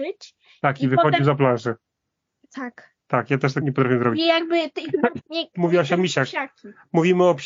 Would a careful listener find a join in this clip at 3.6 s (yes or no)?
yes